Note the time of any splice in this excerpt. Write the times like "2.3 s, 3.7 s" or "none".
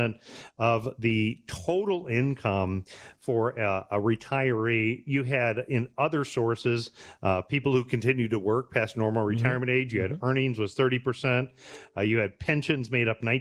none